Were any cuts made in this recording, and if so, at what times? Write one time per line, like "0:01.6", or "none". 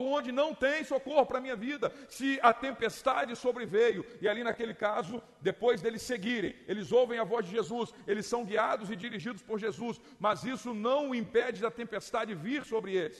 none